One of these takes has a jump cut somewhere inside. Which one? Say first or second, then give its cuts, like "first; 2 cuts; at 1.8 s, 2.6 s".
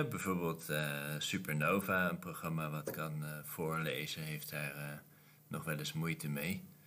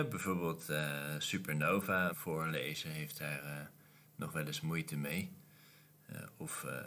second; 1 cut; at 2.1 s